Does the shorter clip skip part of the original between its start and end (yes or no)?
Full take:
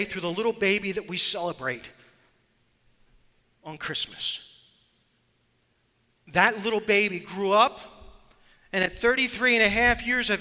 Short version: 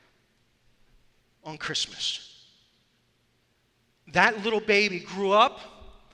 no